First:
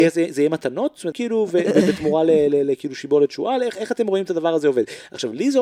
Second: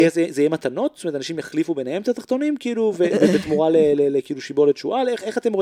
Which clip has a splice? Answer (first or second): first